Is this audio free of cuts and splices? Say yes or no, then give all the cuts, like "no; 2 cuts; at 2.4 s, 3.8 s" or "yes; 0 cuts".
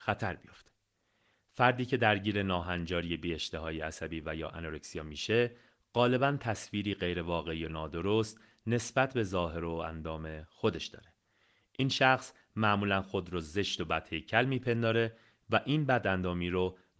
yes; 0 cuts